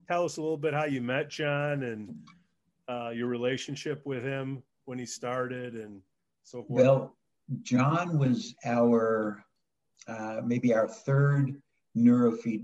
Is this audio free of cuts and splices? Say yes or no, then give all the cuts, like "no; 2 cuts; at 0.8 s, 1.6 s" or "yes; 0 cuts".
yes; 0 cuts